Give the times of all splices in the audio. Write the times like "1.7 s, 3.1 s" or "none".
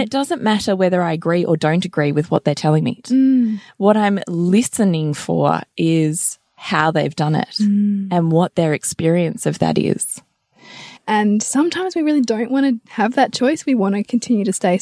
3.0 s, 11.0 s